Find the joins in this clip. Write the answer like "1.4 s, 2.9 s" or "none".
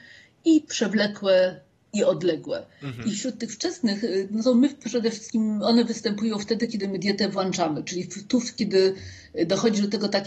none